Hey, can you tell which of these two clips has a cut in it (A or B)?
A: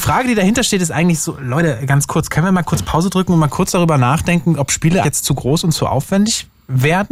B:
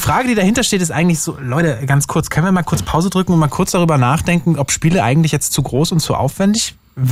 A